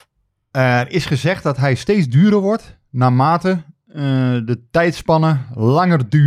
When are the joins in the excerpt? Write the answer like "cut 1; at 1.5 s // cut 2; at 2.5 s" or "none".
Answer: none